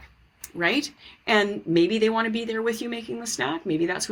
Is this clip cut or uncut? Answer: uncut